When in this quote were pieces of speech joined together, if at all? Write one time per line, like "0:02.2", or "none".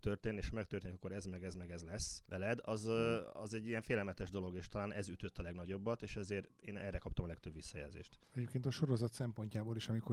none